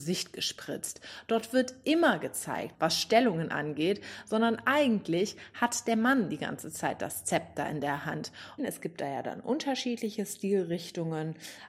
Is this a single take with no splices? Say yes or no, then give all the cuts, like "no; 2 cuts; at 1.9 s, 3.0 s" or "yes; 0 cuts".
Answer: no; 2 cuts; at 2.7 s, 8.6 s